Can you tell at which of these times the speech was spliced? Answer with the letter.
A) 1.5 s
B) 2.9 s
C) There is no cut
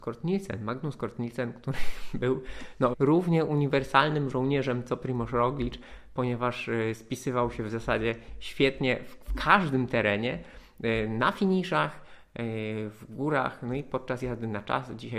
B